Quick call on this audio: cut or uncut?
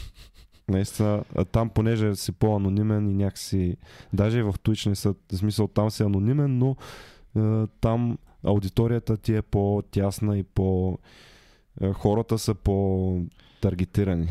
uncut